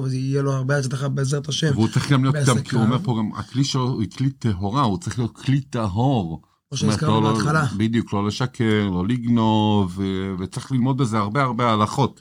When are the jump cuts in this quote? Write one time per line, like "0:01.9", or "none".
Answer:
none